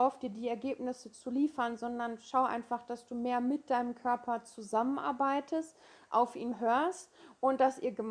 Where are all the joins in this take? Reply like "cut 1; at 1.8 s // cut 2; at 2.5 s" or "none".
none